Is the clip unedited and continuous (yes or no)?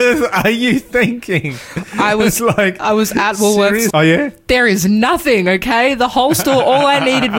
no